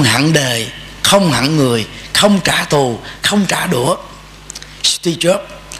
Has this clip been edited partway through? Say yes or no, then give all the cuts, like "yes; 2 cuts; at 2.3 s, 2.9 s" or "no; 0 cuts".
no; 0 cuts